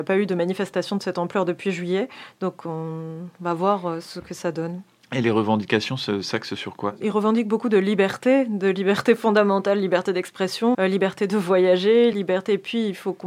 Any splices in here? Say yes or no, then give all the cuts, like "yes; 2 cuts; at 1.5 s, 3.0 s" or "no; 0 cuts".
yes; 2 cuts; at 10.7 s, 12.1 s